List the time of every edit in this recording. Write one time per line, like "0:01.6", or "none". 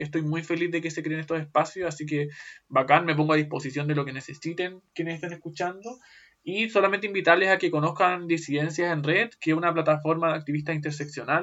none